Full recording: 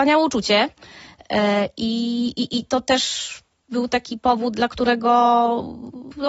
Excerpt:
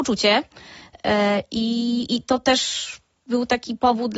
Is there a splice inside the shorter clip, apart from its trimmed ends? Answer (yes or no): yes